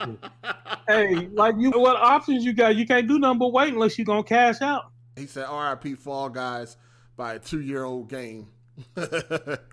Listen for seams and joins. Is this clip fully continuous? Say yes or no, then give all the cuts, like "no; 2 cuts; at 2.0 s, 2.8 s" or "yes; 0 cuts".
no; 2 cuts; at 1.7 s, 5.2 s